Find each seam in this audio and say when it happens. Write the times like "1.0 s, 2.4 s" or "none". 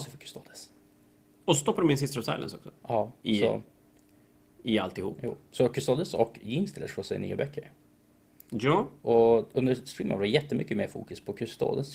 none